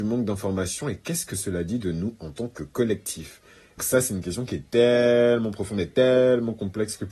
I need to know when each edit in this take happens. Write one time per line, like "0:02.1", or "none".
0:03.8